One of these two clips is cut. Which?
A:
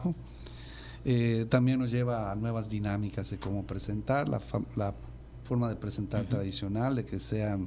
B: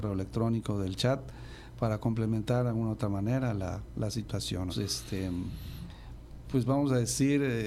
B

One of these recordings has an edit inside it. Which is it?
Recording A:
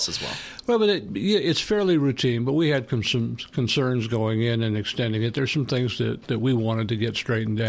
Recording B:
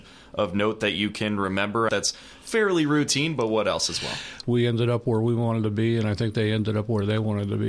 B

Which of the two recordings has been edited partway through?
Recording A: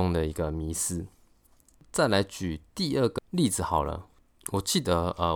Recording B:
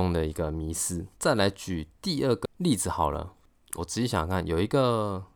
B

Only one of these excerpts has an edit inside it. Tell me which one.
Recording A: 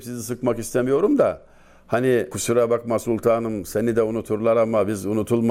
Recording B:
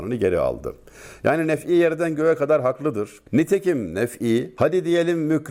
B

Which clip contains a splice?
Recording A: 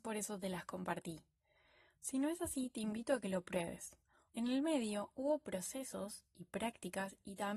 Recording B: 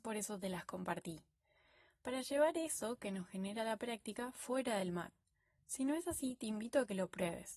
A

